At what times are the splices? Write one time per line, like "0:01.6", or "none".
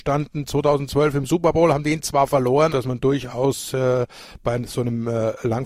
0:02.7